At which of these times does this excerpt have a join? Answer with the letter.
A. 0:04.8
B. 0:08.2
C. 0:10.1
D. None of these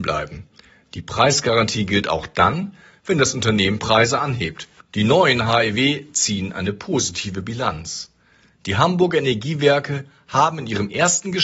A